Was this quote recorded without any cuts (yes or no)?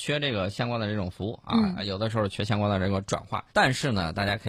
no